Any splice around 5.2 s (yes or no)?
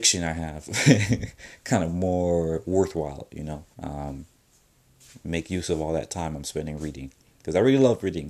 no